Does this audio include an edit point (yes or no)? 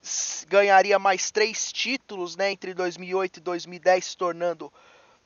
no